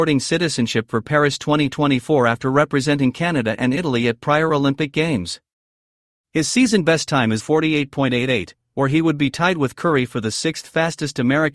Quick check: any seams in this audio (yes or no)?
yes